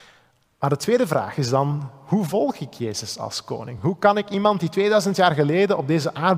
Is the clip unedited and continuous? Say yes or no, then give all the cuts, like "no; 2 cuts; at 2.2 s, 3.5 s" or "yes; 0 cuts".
yes; 0 cuts